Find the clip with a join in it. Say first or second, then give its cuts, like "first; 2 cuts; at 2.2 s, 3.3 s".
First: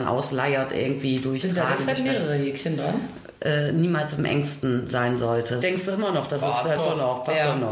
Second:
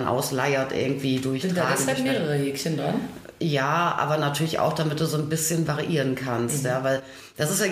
first; 3 cuts; at 3.4 s, 5.6 s, 6.8 s